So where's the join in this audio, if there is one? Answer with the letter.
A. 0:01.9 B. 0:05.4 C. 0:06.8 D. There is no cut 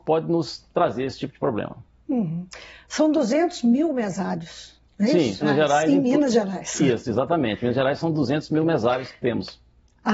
B